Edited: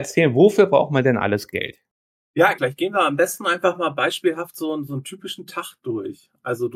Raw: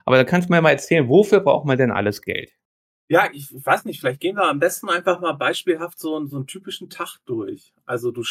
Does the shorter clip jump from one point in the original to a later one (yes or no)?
yes